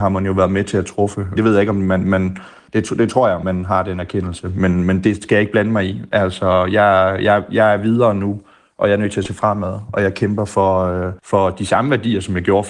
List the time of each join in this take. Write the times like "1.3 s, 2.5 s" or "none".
1.4 s, 3.4 s, 11.2 s